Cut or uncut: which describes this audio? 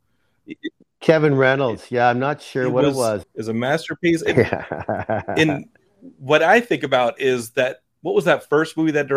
cut